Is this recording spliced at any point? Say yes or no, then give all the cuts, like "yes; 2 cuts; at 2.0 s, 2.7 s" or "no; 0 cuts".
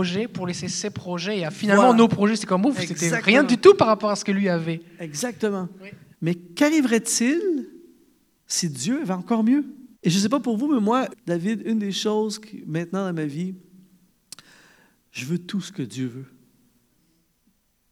yes; 3 cuts; at 6.1 s, 9.9 s, 11.1 s